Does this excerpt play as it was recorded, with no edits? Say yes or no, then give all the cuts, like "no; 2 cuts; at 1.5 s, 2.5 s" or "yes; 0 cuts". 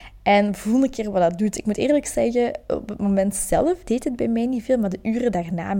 yes; 0 cuts